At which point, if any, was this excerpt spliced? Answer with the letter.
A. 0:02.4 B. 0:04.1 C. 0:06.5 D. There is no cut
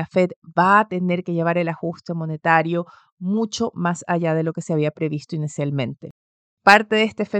C